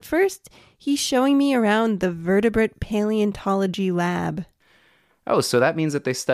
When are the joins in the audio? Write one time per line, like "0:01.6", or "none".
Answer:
none